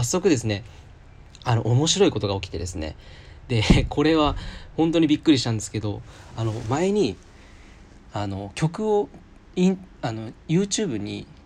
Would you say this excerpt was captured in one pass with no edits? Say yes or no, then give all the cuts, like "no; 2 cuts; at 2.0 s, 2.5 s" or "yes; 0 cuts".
yes; 0 cuts